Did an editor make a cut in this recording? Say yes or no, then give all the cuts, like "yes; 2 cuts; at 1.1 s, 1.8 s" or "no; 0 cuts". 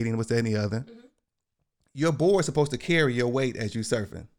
no; 0 cuts